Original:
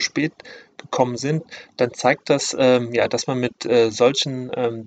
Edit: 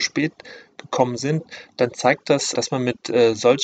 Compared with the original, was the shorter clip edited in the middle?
yes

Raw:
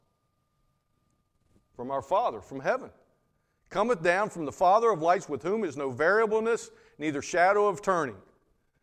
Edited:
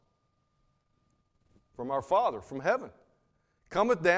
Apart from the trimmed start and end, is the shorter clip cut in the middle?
no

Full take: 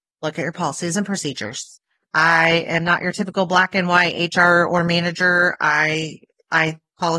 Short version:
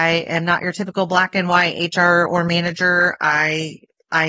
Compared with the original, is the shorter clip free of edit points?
yes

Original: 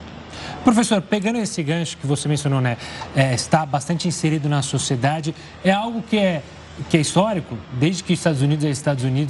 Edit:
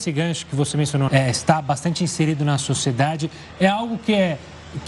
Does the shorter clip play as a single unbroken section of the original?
no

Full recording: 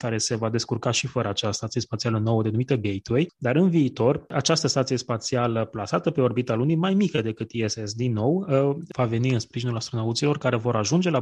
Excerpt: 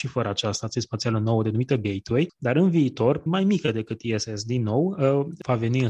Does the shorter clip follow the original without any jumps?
no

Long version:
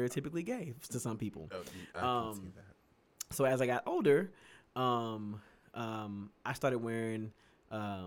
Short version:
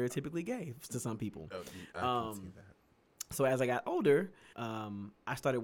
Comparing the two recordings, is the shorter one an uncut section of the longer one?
no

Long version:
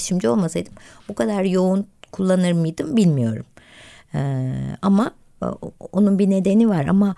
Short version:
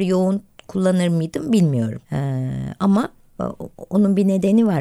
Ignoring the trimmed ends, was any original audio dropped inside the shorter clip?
yes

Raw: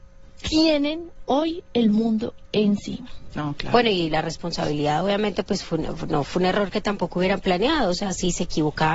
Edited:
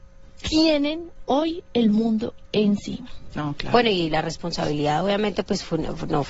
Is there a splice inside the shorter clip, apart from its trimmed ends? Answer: no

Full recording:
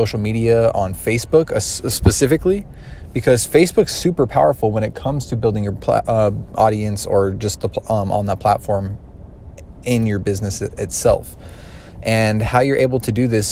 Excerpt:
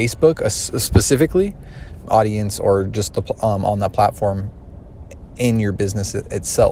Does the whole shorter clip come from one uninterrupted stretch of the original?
no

